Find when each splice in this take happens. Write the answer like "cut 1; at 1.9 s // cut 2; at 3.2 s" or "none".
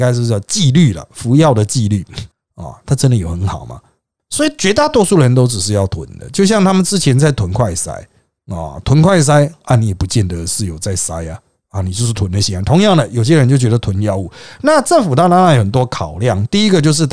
none